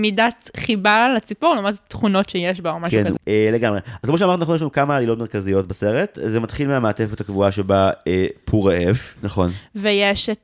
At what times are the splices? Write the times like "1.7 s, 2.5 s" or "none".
3.2 s, 9.2 s